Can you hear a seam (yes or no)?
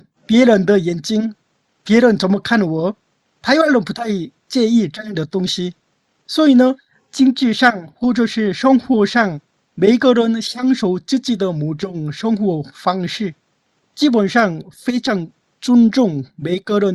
no